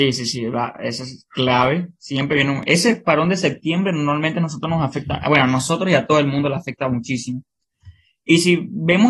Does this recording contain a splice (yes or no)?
no